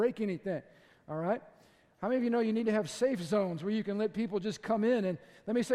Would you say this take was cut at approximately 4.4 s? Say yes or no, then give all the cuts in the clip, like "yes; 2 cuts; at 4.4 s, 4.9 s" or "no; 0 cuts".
no; 0 cuts